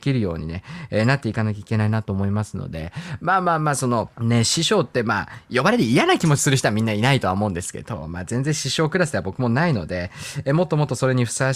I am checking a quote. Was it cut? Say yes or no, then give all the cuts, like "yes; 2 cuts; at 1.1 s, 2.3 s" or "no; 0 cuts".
yes; 1 cut; at 4.1 s